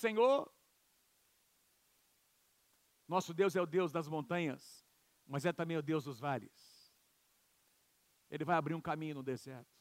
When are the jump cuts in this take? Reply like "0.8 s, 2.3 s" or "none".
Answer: 8.2 s